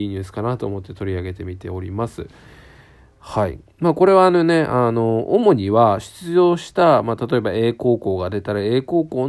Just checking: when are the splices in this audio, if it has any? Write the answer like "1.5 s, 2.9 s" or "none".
none